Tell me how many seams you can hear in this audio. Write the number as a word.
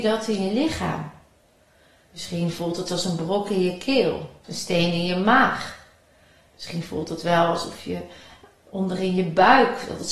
one